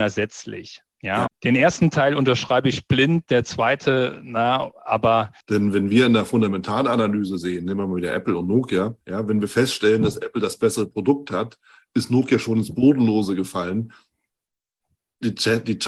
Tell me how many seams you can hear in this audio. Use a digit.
3